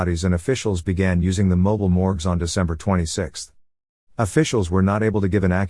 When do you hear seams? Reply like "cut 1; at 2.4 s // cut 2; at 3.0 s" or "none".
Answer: none